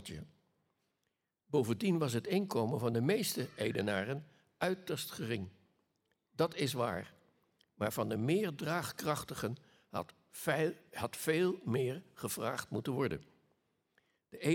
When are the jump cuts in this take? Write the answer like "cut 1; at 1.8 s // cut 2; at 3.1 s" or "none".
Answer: none